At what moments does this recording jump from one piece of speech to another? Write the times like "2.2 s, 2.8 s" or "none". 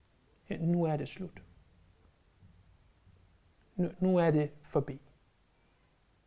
3.9 s